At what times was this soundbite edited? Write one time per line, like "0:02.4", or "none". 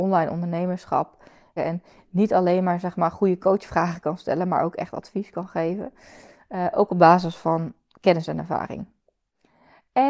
0:01.6